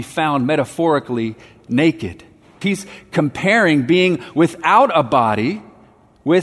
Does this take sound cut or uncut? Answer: cut